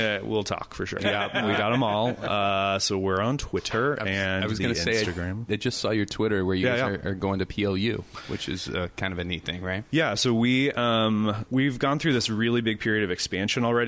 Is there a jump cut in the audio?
yes; 2 cuts; at 1.0 s, 11.5 s

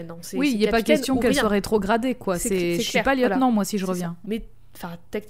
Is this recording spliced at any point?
yes; 1 cut; at 4.2 s

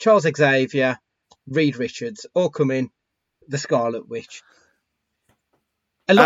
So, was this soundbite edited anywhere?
yes; 1 cut; at 3.4 s

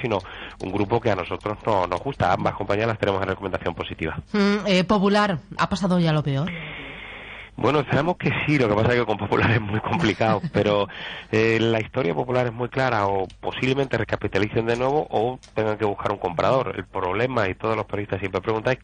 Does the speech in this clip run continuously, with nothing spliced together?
no; 1 cut; at 5.6 s

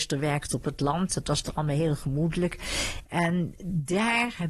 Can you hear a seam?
yes; 1 cut; at 3.0 s

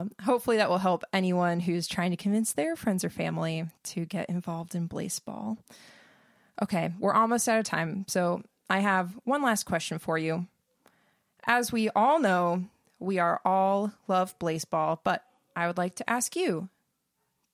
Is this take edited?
no; 0 cuts

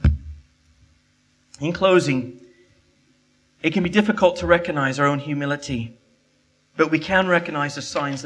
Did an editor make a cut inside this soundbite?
no; 0 cuts

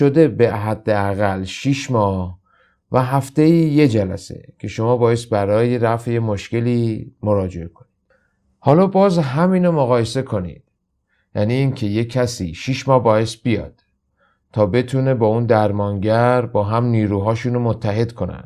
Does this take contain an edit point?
no; 0 cuts

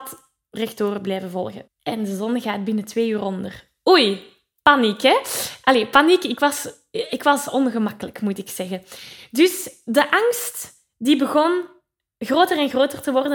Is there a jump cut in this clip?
yes; 1 cut; at 1.7 s

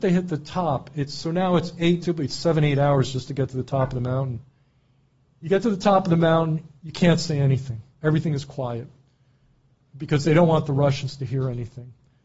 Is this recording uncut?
no; 1 cut; at 2.0 s

